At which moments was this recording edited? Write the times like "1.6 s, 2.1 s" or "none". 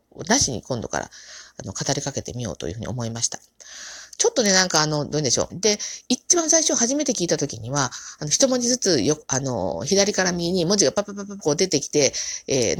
5.5 s, 11.4 s